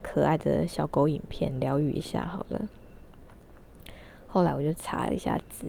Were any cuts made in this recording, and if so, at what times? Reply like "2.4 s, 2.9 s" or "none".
none